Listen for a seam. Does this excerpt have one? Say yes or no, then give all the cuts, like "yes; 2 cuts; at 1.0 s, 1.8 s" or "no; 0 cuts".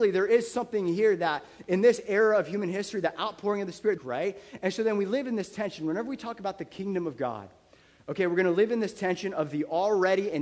yes; 1 cut; at 4.0 s